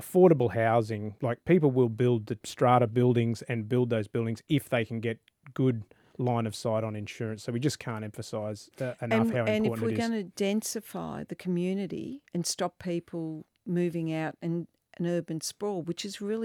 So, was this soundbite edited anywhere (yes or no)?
yes